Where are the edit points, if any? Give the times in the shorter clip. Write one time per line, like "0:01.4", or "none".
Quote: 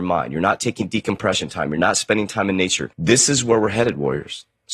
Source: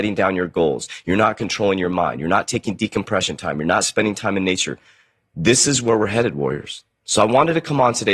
0:02.9